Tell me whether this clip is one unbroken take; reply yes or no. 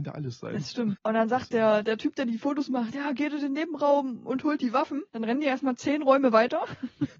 no